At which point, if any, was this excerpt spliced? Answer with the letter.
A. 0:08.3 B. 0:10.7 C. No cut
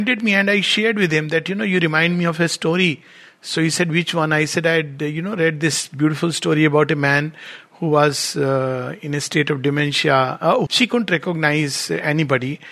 B